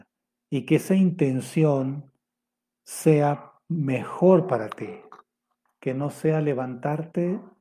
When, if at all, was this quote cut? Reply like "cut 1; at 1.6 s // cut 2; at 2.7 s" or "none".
cut 1; at 5.7 s